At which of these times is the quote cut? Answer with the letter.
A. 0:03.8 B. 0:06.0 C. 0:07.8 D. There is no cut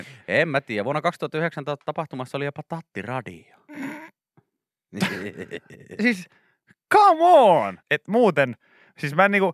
C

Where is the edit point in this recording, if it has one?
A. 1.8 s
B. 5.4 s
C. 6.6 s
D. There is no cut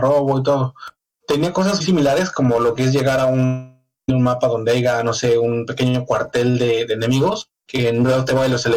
A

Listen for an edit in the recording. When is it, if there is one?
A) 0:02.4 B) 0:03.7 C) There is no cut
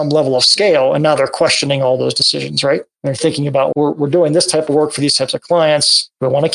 B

